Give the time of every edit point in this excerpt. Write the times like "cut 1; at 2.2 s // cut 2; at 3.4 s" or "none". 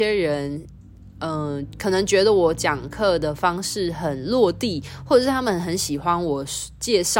none